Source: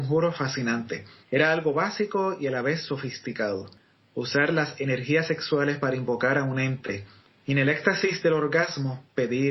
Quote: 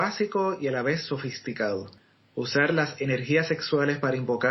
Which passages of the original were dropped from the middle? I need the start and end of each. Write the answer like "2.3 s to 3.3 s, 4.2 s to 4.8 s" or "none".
none